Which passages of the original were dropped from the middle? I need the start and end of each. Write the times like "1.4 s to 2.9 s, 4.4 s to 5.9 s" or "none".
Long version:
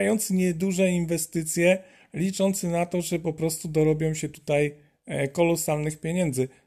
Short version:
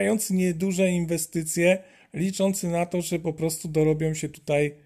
none